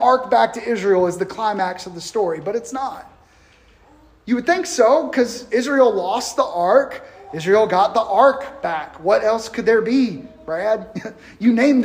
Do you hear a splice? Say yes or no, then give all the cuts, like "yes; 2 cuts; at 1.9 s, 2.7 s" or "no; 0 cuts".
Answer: no; 0 cuts